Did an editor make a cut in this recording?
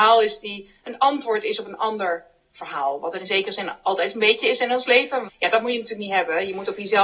yes; 1 cut; at 5.3 s

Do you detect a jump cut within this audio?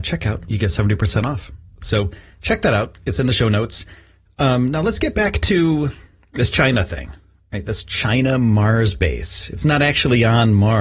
no; 0 cuts

